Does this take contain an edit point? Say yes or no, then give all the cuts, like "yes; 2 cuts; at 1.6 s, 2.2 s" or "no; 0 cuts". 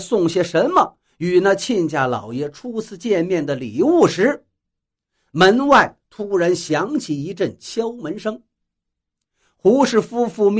no; 0 cuts